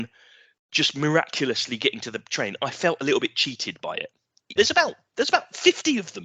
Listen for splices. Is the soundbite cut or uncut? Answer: cut